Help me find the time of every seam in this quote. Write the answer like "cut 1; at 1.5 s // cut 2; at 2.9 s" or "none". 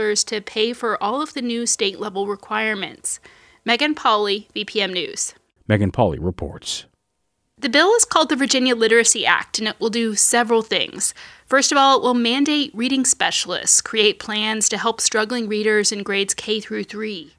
cut 1; at 5.6 s